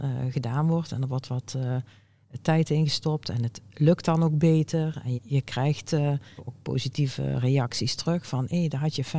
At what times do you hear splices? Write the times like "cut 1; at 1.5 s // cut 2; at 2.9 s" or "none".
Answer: cut 1; at 5.1 s // cut 2; at 6.4 s